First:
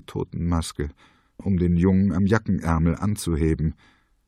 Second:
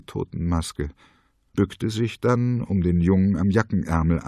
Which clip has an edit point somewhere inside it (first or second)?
first